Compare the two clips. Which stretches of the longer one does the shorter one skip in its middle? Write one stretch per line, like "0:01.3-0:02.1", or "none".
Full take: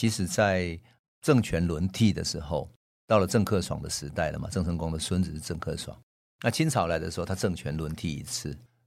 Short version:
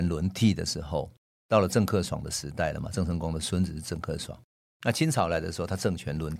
none